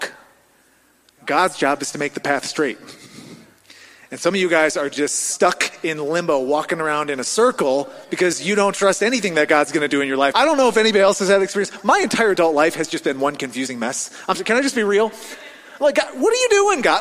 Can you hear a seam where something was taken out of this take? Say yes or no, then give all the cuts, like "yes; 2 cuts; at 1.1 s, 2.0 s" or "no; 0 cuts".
yes; 1 cut; at 10.3 s